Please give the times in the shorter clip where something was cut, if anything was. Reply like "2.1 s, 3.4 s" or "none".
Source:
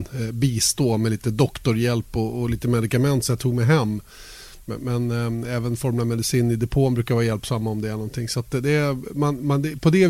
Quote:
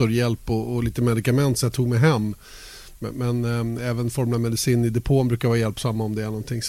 none